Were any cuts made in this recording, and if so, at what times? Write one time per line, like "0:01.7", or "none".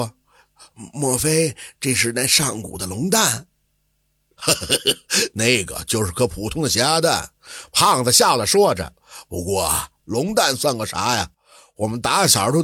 none